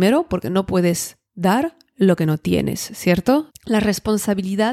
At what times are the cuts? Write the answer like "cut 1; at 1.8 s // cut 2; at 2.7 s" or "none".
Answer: cut 1; at 3.5 s